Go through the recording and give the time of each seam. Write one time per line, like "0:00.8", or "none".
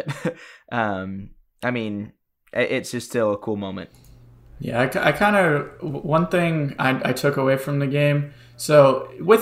none

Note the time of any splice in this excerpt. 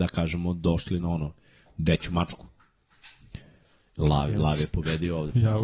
0:01.0

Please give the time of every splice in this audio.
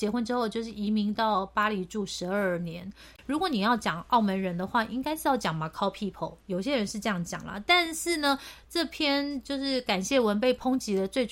0:03.2

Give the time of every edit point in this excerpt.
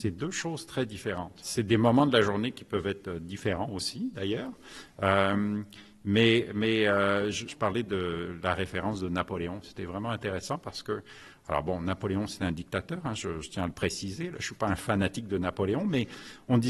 none

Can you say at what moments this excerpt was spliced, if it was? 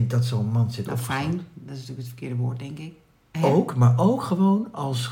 0:03.3

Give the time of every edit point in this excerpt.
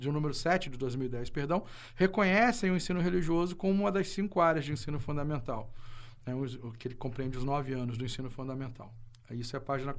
none

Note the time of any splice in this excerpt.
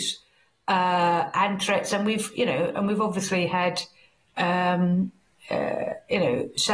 none

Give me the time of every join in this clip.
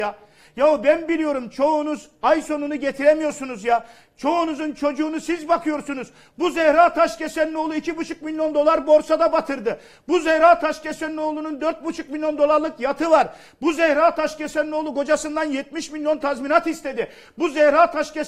none

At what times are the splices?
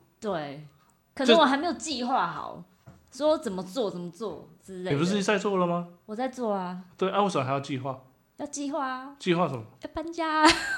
none

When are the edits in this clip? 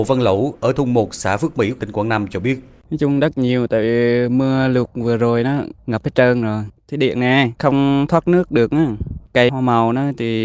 0:01.8

